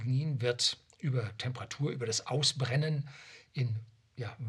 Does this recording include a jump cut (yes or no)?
no